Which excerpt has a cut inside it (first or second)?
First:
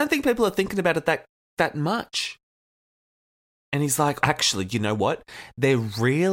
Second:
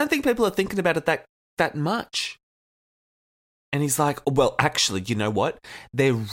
first